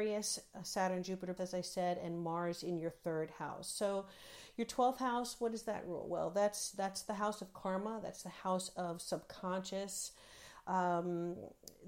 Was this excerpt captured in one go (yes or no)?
no